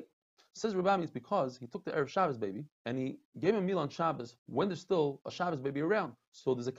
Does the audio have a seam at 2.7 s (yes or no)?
yes